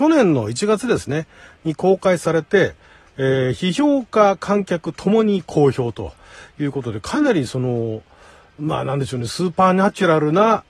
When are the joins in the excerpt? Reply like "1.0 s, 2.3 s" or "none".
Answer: none